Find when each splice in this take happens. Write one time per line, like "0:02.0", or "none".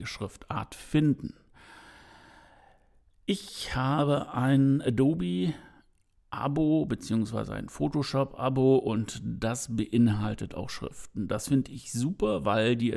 none